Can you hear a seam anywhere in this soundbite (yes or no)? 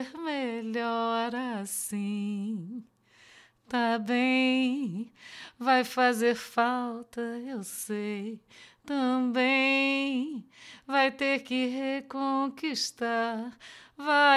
no